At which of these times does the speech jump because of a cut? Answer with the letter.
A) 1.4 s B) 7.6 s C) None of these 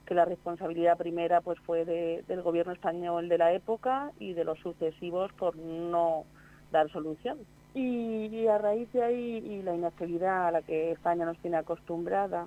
B